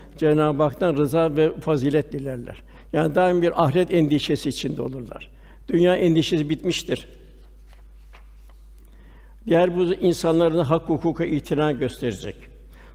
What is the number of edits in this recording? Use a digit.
0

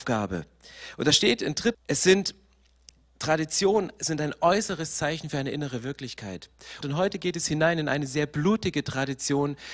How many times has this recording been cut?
2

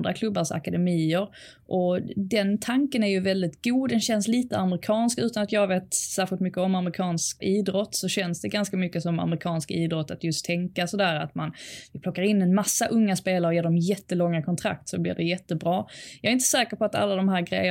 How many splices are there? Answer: 1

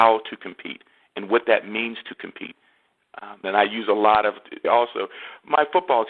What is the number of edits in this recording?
2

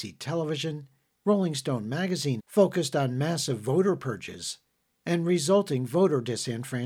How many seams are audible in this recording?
1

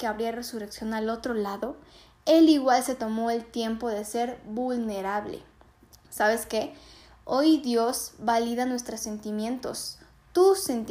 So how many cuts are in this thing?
0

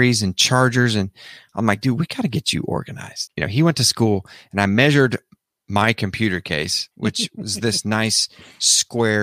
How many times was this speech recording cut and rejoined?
1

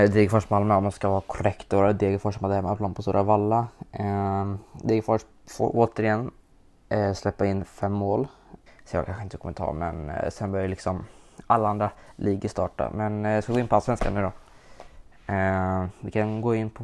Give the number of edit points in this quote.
1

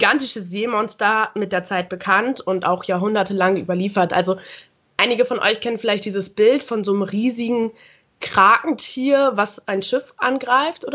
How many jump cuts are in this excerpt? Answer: 0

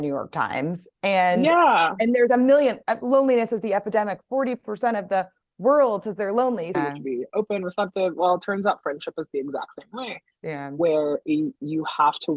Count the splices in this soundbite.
1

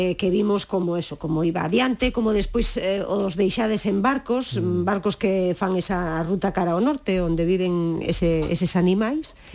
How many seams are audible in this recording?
0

